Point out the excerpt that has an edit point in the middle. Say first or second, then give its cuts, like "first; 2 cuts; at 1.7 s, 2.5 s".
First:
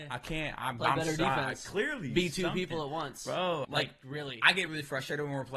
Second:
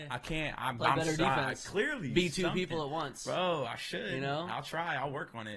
first; 2 cuts; at 3.6 s, 4.7 s